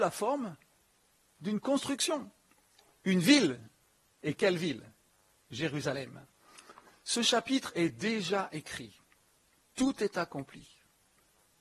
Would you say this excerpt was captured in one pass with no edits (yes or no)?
yes